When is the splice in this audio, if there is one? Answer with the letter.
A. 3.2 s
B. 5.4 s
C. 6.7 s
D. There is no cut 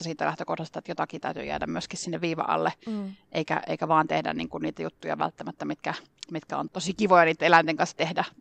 C